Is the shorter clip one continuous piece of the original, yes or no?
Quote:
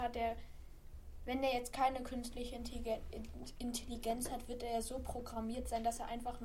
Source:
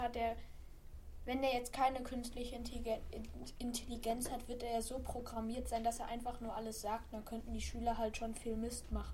yes